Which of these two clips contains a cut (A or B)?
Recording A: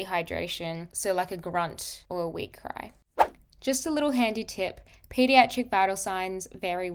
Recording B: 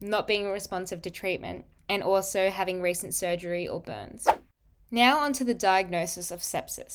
A